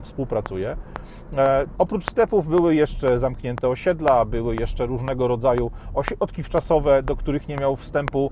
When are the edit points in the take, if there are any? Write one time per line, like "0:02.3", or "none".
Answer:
0:01.8